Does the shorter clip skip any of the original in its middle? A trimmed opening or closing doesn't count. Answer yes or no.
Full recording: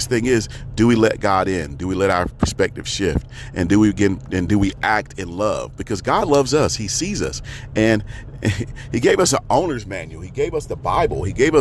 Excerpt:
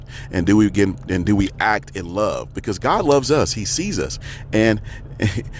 no